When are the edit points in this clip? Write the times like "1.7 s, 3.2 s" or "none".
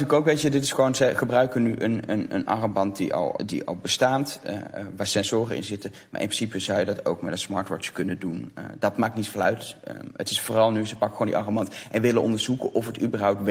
3.4 s